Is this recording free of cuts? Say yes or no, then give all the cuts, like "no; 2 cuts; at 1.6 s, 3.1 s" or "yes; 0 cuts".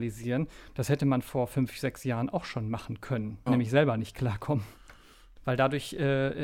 no; 2 cuts; at 3.5 s, 5.4 s